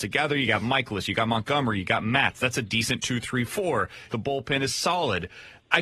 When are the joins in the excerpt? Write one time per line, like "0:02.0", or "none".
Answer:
0:04.1